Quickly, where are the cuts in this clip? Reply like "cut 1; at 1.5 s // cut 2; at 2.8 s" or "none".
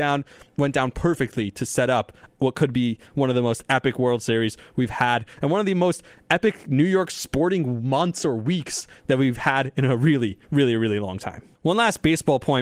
cut 1; at 11.5 s